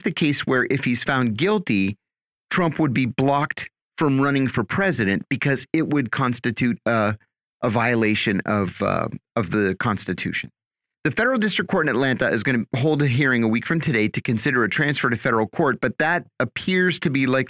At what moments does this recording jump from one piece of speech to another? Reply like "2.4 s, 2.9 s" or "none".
none